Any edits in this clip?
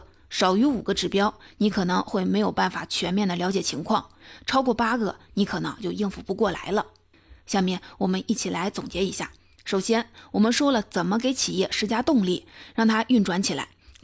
yes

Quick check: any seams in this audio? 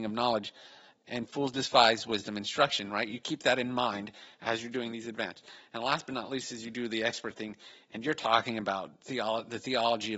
no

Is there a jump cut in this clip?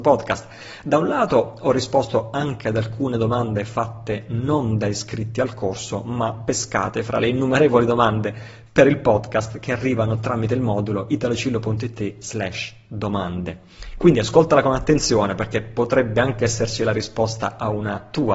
no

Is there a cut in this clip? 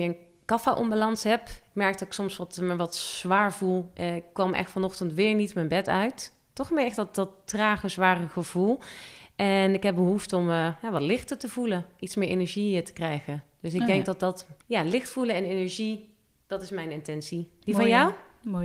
yes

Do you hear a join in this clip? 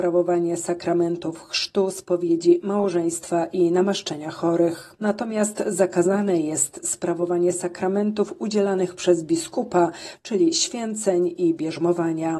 no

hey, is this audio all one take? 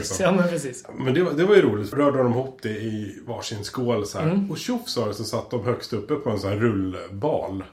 no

